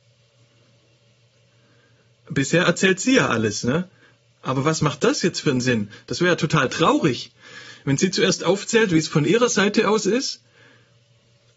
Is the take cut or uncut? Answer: uncut